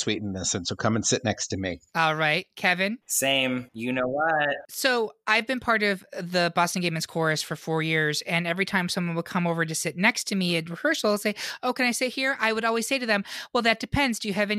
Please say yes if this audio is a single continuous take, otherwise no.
yes